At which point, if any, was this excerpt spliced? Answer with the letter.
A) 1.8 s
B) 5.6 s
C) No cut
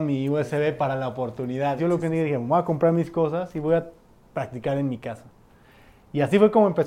A